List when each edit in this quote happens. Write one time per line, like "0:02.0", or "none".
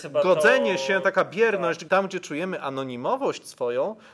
0:01.9